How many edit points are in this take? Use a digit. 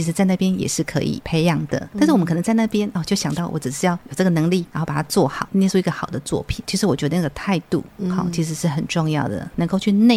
1